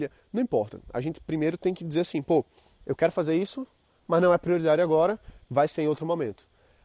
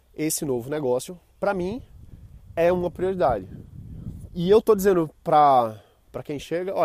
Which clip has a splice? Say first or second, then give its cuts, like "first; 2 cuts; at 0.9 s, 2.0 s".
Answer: second; 1 cut; at 4.3 s